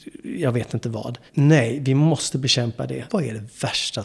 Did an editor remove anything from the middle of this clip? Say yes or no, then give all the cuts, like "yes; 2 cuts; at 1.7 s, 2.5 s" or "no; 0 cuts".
yes; 2 cuts; at 1.3 s, 3.1 s